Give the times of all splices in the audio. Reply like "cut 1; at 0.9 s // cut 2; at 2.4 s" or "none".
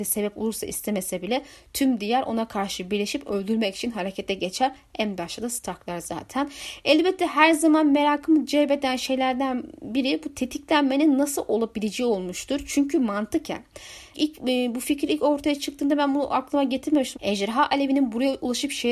cut 1; at 14.1 s // cut 2; at 17.1 s